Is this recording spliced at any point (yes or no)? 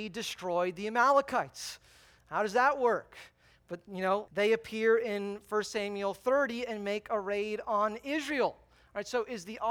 yes